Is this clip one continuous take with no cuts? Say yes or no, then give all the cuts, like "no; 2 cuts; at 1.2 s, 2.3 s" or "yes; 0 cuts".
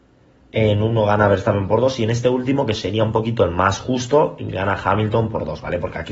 yes; 0 cuts